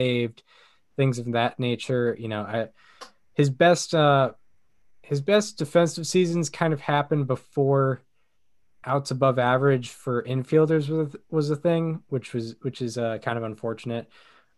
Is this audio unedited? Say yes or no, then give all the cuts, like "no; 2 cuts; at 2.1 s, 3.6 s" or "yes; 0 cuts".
yes; 0 cuts